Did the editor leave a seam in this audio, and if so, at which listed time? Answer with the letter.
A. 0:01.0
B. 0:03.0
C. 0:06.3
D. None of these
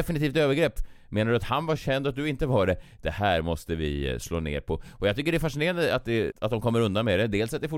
C